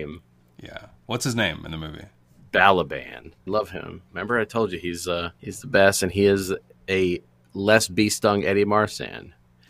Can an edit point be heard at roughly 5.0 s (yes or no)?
no